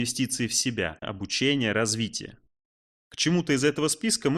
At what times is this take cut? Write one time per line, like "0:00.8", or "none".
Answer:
0:01.0